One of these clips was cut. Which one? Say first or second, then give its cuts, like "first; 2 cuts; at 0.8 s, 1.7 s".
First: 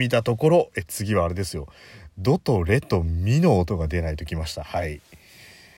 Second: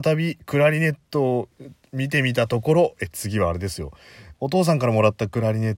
second; 1 cut; at 4.3 s